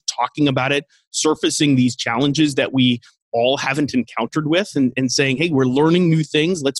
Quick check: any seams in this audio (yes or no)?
no